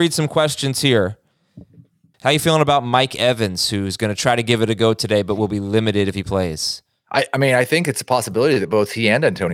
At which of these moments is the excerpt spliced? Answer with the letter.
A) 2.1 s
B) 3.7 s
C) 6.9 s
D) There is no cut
A